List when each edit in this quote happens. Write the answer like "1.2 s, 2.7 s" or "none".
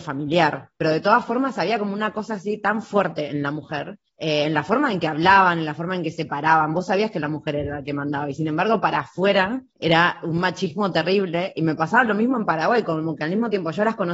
4.1 s